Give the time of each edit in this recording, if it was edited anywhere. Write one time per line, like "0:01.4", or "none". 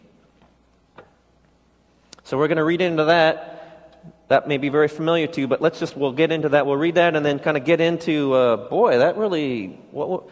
none